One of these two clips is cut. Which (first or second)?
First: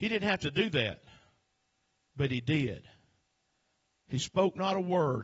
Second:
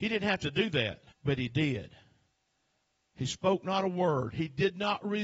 second